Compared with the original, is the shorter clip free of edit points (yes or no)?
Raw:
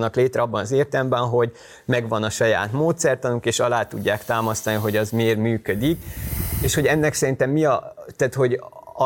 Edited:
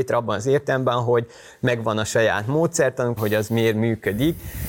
no